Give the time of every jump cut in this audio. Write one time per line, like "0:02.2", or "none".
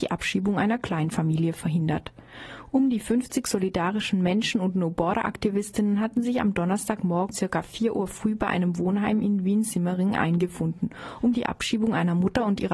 0:07.3